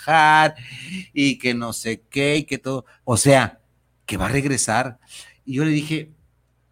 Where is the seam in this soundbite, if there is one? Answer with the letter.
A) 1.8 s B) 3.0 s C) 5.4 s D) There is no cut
B